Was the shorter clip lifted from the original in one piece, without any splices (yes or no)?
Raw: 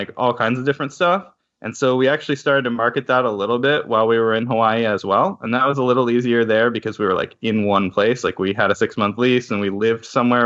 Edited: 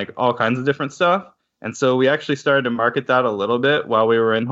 yes